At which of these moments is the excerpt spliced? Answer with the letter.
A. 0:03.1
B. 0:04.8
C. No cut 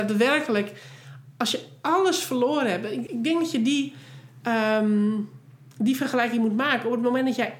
A